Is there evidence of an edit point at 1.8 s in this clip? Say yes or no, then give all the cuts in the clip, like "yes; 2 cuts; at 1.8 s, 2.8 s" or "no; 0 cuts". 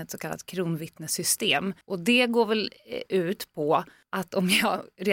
yes; 1 cut; at 1.8 s